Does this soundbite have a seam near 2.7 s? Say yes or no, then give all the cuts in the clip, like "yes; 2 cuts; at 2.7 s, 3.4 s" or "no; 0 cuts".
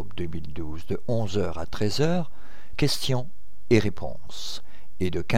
yes; 1 cut; at 2.7 s